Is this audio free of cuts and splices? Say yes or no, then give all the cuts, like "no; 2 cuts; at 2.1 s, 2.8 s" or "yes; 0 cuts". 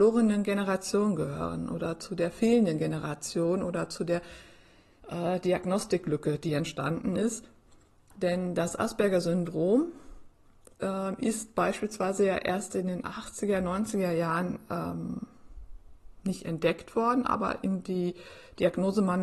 yes; 0 cuts